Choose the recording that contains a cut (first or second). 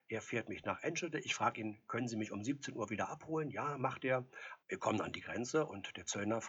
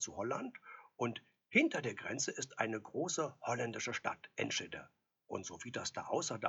first